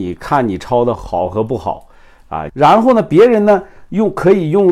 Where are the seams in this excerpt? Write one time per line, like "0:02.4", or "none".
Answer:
0:01.0
0:02.5